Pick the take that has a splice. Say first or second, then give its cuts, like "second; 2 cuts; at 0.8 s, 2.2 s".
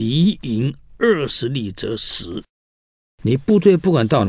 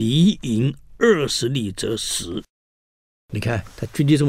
first; 1 cut; at 3.0 s